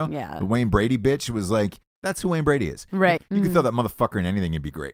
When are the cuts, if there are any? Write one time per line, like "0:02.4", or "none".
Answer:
0:03.2